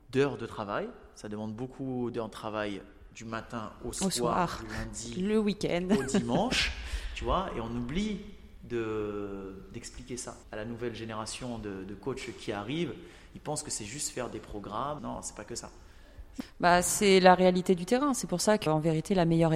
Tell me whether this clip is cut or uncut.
cut